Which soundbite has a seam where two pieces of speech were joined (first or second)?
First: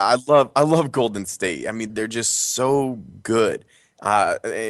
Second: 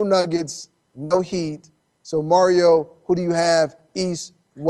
first